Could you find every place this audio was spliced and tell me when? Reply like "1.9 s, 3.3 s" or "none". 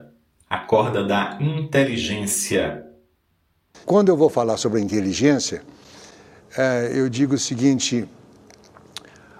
3.7 s

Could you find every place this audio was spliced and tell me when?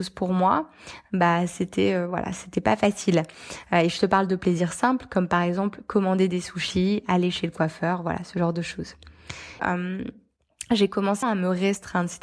9.6 s, 11.2 s

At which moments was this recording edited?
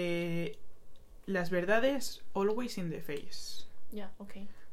none

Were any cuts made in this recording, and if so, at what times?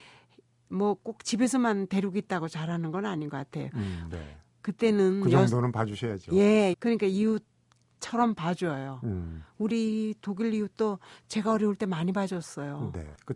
4.1 s, 6.7 s

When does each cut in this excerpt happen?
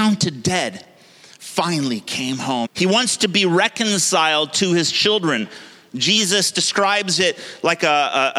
2.7 s

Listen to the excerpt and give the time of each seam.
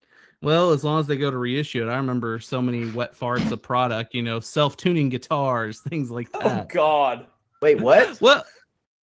none

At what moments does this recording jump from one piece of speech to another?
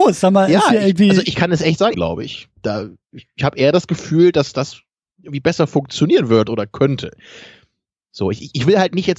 1.9 s

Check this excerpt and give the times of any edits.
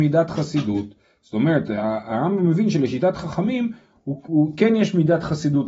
4.3 s

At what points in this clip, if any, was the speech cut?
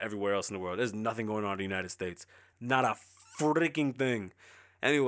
2.5 s

